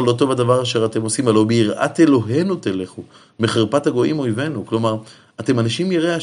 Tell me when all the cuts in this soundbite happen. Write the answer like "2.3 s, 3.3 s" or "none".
none

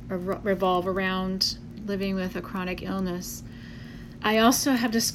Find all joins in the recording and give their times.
4.2 s

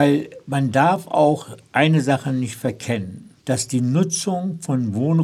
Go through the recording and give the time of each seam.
3.4 s

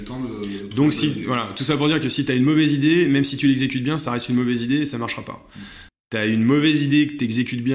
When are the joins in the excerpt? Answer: 5.9 s

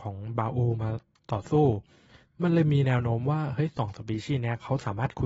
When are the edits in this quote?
none

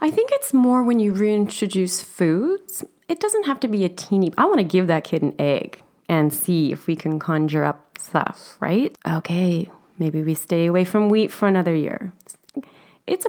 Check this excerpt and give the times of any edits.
9.0 s

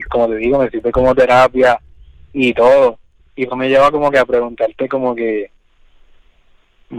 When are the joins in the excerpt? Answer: 3.5 s

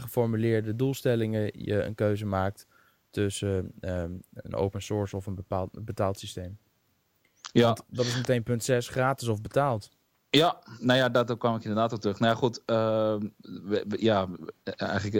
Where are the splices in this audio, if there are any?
none

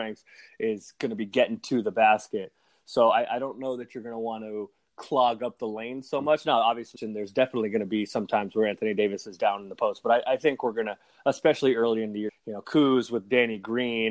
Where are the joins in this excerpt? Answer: 7.0 s, 12.3 s

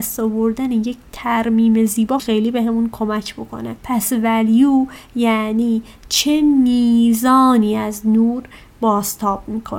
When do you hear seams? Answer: 2.2 s

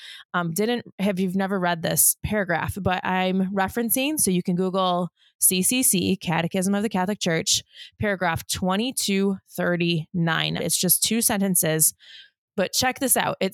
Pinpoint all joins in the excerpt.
10.6 s

